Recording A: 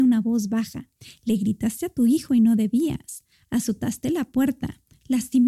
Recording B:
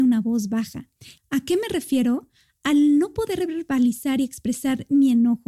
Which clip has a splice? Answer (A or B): B